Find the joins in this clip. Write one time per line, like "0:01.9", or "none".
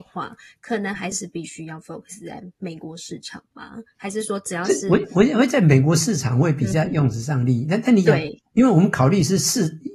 0:01.1